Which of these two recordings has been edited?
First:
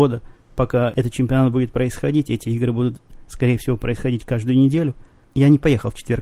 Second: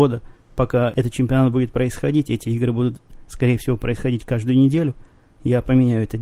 first; 1 cut; at 5.2 s

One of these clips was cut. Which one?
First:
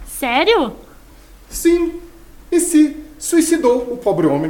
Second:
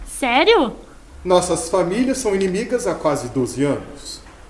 second; 1 cut; at 1.1 s

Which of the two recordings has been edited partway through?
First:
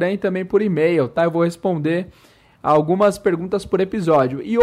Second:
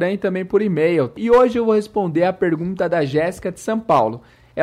second; 1 cut; at 1.2 s

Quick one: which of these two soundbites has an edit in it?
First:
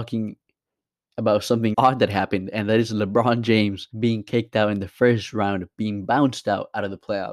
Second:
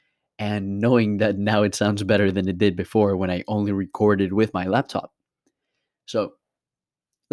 first; 2 cuts; at 1.7 s, 3.9 s

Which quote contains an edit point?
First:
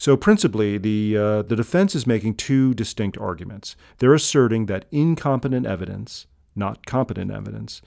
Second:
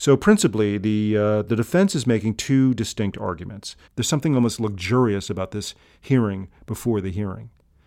second; 1 cut; at 3.9 s

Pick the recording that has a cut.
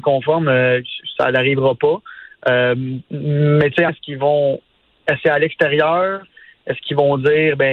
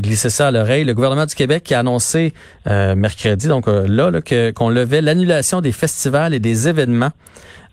first; 1 cut; at 3.9 s

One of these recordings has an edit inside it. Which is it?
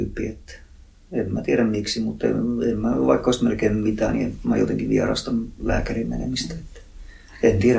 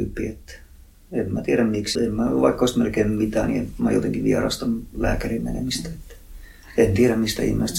second; 1 cut; at 2.0 s

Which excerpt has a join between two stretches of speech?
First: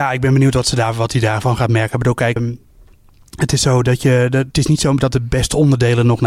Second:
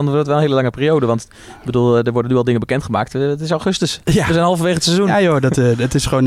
first; 2 cuts; at 2.4 s, 4.5 s

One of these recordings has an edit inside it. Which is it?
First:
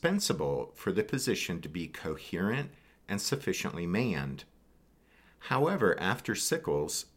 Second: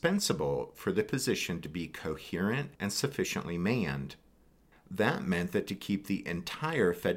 second; 2 cuts; at 2.7 s, 4.7 s

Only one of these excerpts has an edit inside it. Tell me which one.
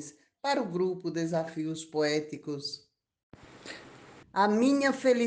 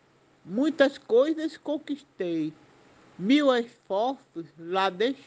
first; 1 cut; at 4.2 s

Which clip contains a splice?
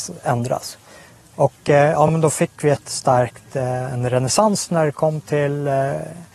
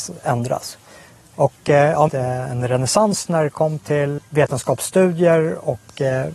second; 2 cuts; at 2.1 s, 4.2 s

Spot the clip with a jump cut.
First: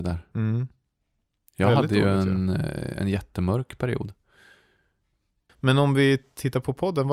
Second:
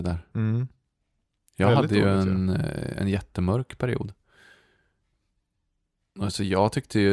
first; 1 cut; at 5.5 s

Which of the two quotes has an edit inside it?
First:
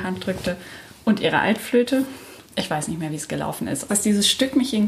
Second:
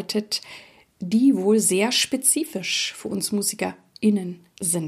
first; 2 cuts; at 2.4 s, 3.9 s

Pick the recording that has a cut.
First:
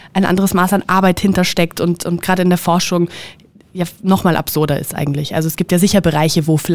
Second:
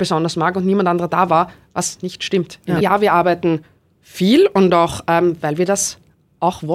second; 1 cut; at 2.8 s

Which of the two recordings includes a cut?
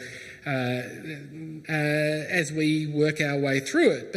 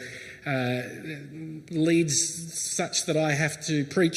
first; 1 cut; at 1.6 s

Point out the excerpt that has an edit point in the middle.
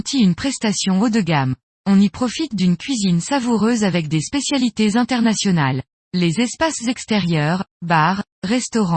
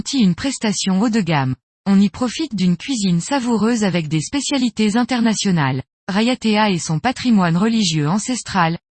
second; 1 cut; at 6.0 s

